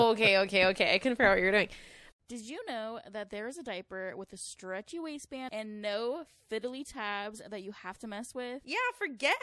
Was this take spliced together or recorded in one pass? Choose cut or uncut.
uncut